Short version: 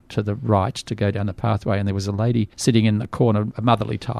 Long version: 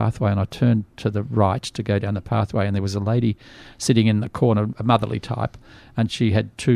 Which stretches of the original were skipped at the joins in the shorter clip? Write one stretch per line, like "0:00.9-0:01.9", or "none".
0:03.4-0:03.7